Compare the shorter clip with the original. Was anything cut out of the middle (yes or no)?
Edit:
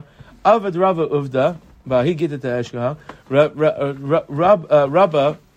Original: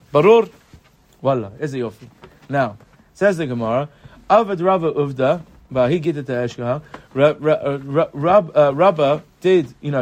no